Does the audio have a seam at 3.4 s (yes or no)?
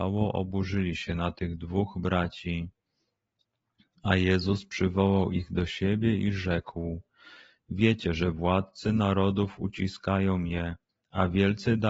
no